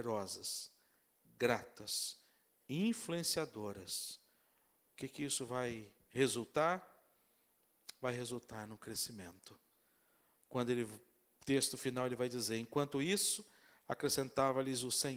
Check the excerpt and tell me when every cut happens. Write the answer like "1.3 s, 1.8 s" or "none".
none